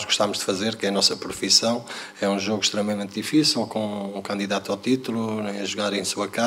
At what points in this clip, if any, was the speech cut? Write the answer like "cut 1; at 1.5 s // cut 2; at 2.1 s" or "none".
none